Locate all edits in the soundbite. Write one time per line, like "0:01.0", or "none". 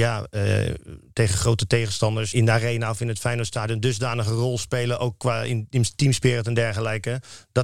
0:02.3